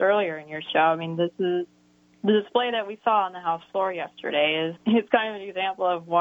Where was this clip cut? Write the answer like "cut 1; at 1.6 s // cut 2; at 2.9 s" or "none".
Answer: cut 1; at 4.8 s